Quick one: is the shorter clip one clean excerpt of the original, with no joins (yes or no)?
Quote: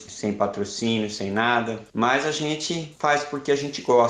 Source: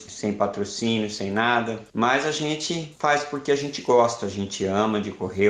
yes